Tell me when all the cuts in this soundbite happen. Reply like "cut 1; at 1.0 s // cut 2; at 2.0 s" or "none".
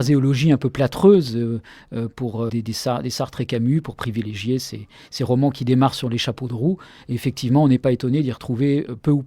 cut 1; at 2.5 s